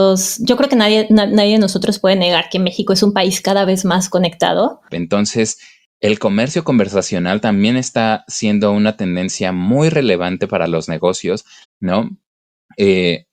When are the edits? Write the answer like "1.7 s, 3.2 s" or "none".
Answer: 4.9 s, 11.6 s